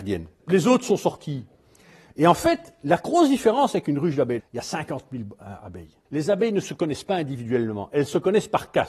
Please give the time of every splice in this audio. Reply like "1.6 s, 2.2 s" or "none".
4.4 s, 6.0 s